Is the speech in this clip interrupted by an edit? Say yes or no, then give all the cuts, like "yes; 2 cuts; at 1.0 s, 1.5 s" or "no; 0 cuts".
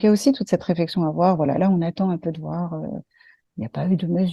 no; 0 cuts